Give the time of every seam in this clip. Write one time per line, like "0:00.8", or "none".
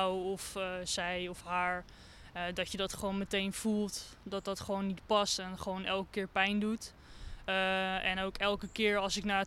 none

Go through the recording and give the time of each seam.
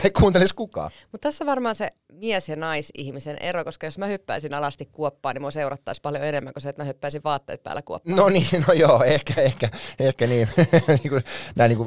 none

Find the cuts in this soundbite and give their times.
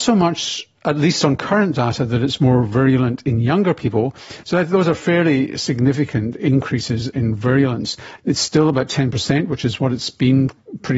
0:04.4
0:08.2

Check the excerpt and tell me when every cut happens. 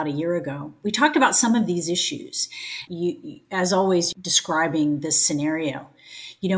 0:02.9
0:04.1

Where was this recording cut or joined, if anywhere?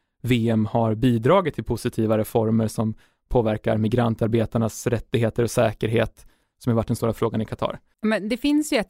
0:07.9

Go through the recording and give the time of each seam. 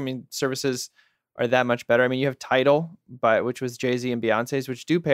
none

